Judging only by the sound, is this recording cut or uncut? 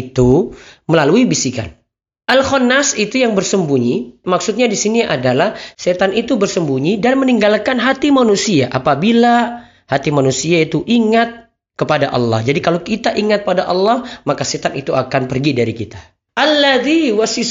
uncut